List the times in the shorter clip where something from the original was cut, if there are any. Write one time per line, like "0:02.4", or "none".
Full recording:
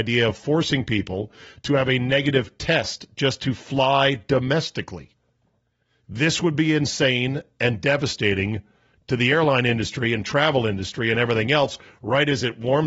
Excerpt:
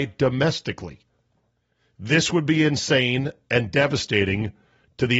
none